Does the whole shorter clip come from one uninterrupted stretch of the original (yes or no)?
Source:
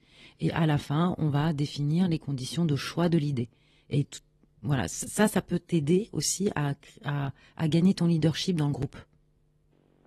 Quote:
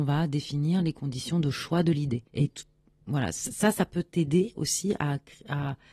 no